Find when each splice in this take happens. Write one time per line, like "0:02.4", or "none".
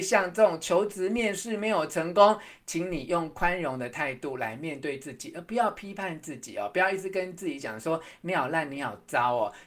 none

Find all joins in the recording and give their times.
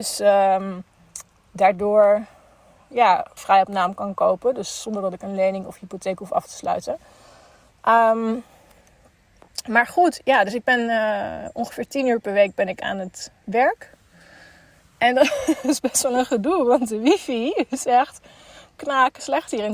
0:03.4

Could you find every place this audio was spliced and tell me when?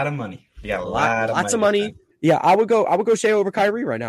0:02.1

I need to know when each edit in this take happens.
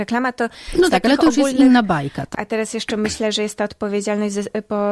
0:02.3

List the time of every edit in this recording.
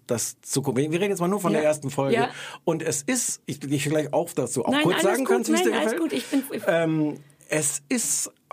none

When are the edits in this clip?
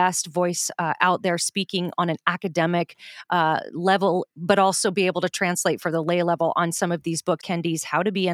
0:07.4

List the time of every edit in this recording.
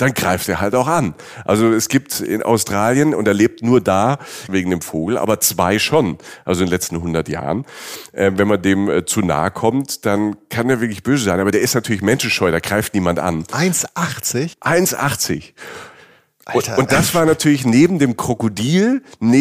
0:04.5

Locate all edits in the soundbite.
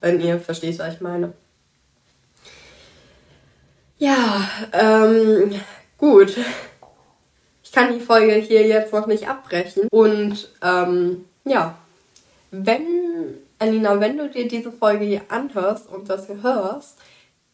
0:09.9

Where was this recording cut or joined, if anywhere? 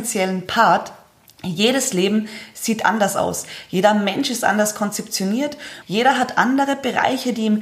0:05.8

